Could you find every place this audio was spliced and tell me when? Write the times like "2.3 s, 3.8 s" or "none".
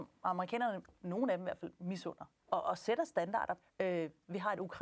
2.4 s, 3.6 s